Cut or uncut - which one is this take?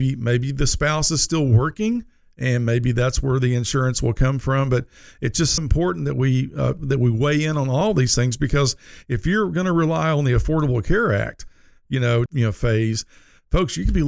cut